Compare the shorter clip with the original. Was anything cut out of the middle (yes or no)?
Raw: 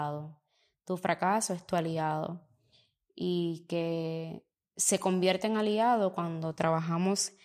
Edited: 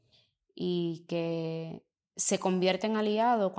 no